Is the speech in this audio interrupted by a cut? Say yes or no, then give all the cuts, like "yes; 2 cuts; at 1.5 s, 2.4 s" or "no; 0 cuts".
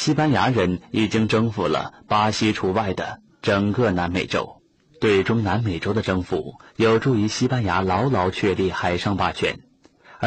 no; 0 cuts